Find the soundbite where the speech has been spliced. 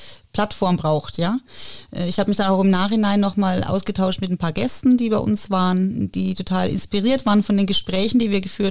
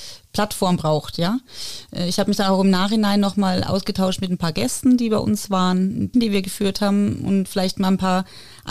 second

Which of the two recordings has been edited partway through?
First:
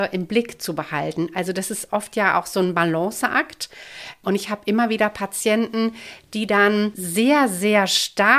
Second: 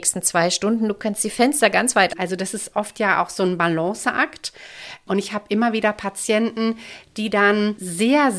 second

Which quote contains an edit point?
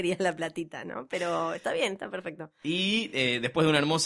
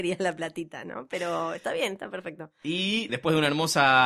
second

